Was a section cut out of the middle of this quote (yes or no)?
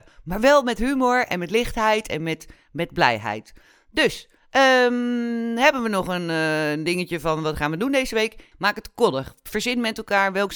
yes